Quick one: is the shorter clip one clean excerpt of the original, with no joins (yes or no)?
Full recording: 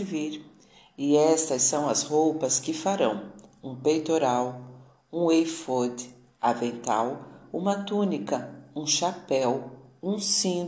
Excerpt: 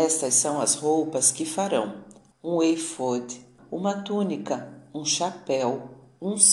no